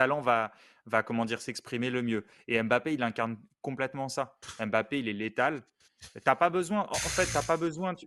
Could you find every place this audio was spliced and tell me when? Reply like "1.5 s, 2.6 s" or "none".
none